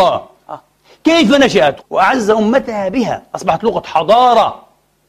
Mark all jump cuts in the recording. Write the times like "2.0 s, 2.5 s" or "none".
1.8 s